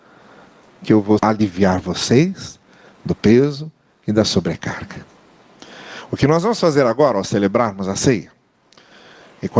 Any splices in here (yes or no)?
yes